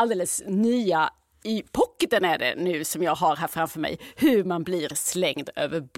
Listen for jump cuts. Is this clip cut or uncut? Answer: uncut